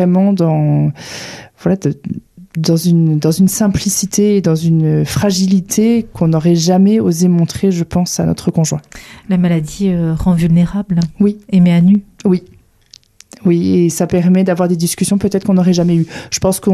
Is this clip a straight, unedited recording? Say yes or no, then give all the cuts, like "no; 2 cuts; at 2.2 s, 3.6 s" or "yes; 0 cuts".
yes; 0 cuts